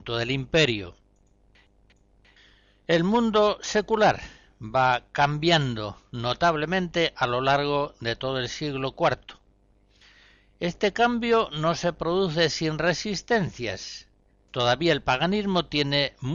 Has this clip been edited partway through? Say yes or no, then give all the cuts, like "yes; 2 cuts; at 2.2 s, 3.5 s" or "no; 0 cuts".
no; 0 cuts